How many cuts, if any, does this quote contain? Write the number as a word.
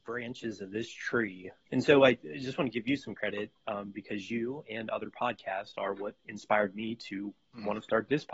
one